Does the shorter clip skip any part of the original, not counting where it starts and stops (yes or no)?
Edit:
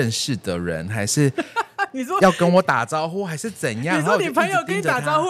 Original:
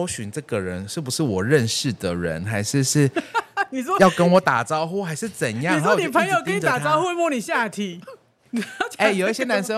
yes